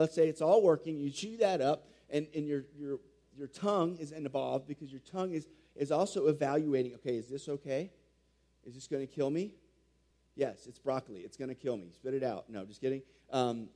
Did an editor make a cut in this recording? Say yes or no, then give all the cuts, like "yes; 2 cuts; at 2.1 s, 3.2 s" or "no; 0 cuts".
no; 0 cuts